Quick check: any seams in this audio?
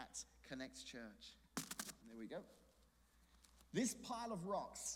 yes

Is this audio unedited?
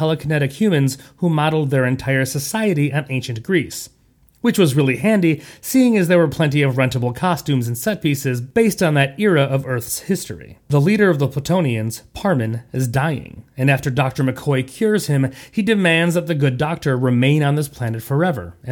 yes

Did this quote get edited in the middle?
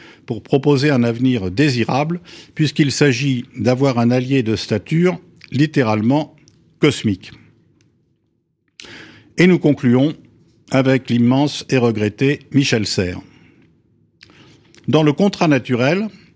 no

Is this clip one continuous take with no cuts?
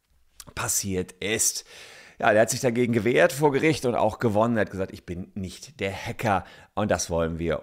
yes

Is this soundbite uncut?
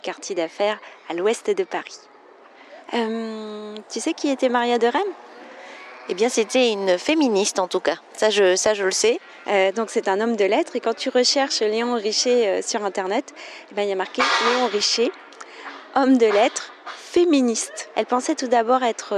no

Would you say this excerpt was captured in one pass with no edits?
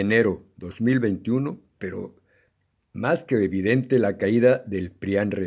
no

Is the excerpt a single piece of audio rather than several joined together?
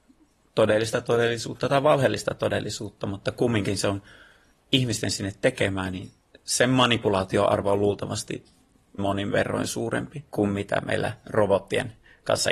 no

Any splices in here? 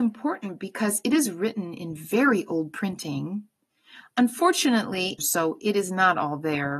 yes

